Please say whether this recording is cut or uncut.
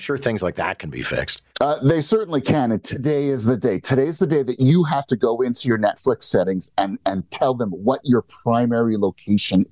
cut